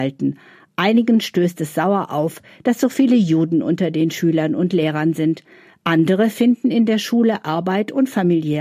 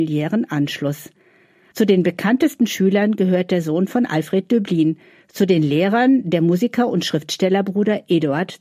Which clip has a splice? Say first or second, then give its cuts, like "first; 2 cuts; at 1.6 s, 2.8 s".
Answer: second; 1 cut; at 1.7 s